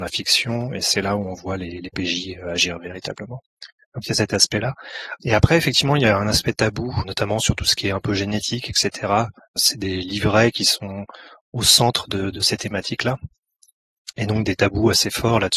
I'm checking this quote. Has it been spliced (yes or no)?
no